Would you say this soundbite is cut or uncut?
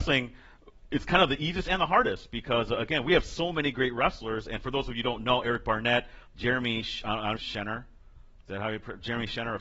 cut